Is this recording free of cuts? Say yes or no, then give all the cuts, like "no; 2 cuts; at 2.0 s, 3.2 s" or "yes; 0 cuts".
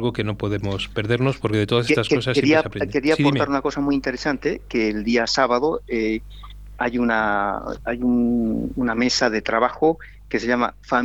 yes; 0 cuts